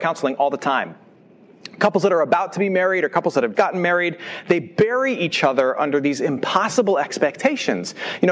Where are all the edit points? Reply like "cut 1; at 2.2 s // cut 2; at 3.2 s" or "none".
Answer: cut 1; at 3.5 s